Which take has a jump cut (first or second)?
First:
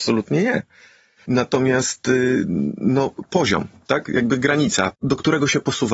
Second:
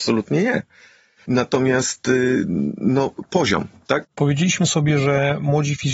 second